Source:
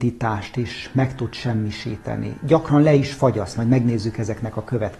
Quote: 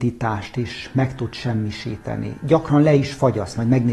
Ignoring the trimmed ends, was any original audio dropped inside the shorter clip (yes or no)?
no